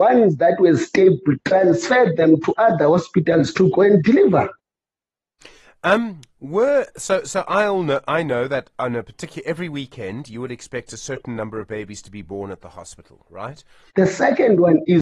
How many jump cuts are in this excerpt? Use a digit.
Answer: 1